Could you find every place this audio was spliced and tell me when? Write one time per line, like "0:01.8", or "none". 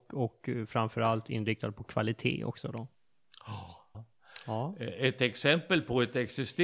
0:03.9